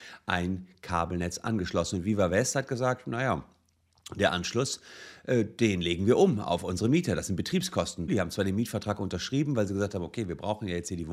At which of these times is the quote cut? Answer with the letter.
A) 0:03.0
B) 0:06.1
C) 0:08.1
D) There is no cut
C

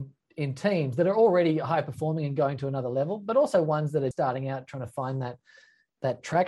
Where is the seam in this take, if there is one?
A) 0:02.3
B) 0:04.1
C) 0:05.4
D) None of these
B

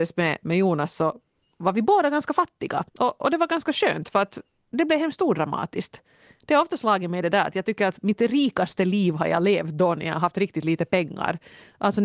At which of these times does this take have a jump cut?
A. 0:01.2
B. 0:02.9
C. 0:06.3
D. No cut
B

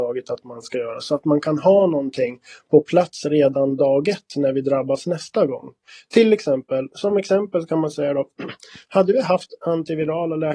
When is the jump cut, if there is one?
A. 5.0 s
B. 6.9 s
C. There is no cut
B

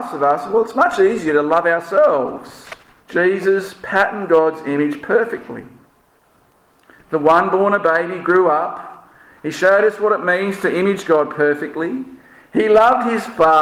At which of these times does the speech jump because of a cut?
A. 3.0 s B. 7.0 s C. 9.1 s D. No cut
A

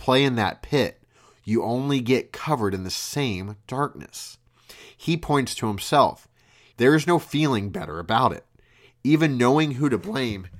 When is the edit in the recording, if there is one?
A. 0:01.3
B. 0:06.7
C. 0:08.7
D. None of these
B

